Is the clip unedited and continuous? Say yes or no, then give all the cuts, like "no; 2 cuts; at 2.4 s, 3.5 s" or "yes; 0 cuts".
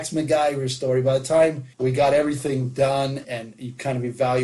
no; 2 cuts; at 1.7 s, 3.2 s